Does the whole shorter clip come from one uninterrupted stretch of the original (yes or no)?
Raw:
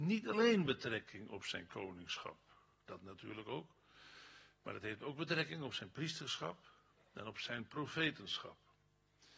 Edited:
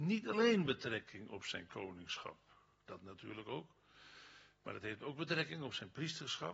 yes